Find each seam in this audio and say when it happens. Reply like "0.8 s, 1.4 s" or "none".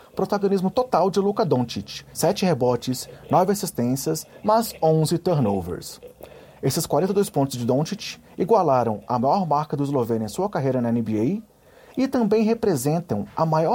2.1 s, 4.4 s